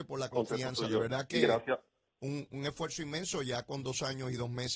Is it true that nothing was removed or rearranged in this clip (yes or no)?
yes